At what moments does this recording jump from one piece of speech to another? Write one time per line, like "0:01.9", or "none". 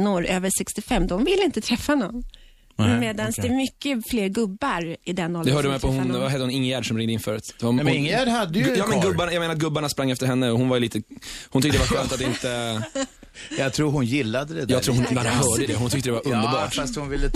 none